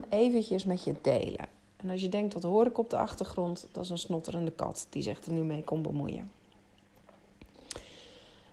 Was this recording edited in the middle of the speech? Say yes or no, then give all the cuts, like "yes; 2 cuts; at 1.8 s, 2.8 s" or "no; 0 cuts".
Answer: no; 0 cuts